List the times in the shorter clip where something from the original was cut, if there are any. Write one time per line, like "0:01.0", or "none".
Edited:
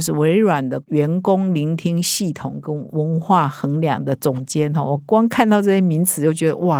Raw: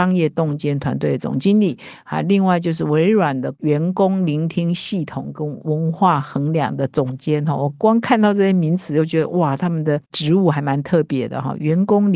none